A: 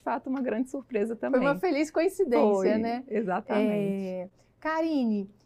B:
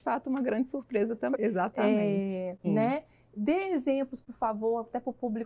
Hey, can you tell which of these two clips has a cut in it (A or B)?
B